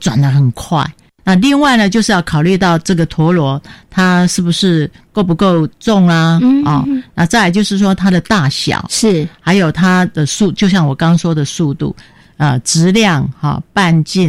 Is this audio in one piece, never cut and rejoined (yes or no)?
yes